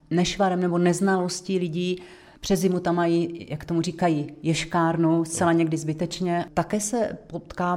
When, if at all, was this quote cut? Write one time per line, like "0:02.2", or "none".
none